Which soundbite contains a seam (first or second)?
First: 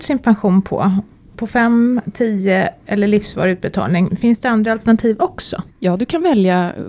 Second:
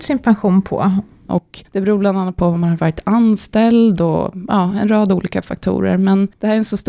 second